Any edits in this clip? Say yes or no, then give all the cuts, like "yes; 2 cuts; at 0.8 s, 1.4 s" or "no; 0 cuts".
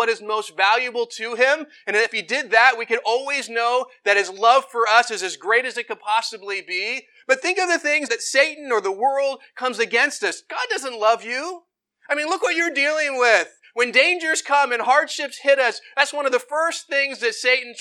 yes; 1 cut; at 8.1 s